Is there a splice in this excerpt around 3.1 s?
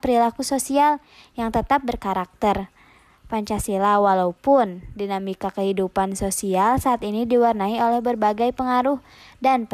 no; 0 cuts

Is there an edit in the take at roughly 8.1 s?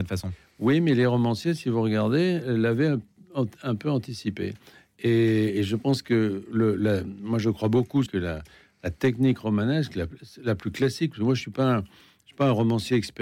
yes; 1 cut; at 8.1 s

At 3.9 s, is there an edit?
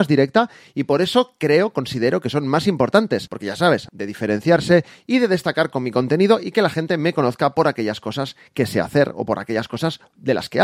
yes; 1 cut; at 3.9 s

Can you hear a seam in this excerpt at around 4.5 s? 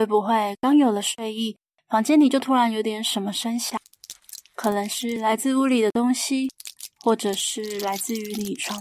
no; 0 cuts

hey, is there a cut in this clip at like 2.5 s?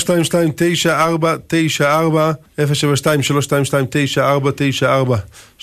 yes; 1 cut; at 2.5 s

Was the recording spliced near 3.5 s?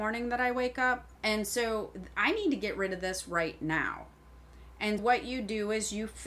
no; 2 cuts; at 1.2 s, 5.0 s

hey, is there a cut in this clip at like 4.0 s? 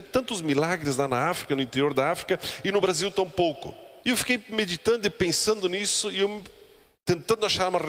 yes; 1 cut; at 4.0 s

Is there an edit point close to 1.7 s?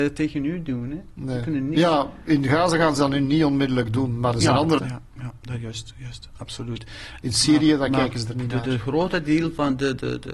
no; 2 cuts; at 4.8 s, 7.2 s

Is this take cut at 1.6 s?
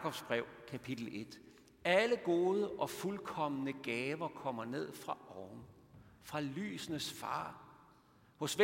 no; 0 cuts

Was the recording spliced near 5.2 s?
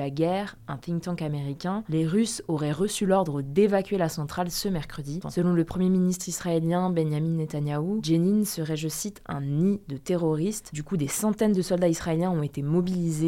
yes; 1 cut; at 5.2 s

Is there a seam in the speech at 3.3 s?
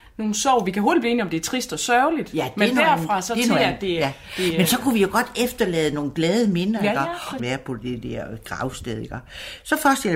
no; 1 cut; at 7.4 s

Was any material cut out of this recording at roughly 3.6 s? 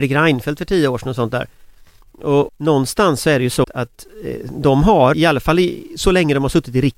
yes; 3 cuts; at 2.5 s, 3.6 s, 5.1 s

